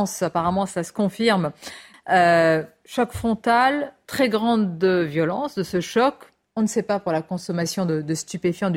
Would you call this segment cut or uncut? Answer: cut